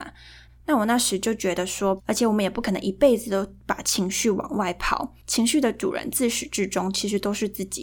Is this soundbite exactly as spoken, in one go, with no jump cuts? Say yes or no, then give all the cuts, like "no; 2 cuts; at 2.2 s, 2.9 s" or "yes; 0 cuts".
no; 1 cut; at 2.0 s